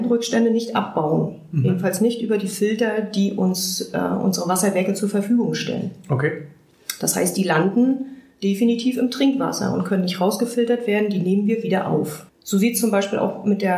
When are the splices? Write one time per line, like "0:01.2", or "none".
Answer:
0:12.3